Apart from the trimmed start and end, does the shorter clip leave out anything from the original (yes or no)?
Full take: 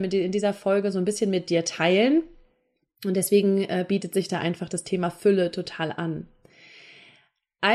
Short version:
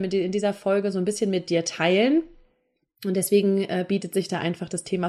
no